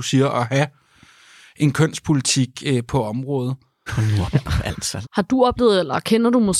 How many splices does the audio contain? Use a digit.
2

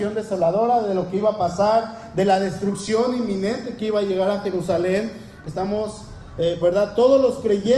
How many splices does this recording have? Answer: 2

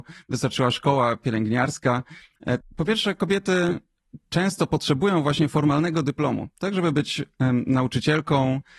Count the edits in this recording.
1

